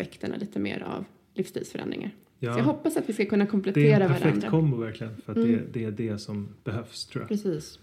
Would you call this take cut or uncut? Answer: cut